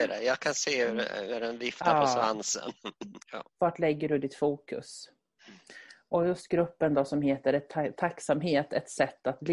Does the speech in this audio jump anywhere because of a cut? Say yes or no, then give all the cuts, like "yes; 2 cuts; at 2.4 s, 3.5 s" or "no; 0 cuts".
yes; 1 cut; at 3.2 s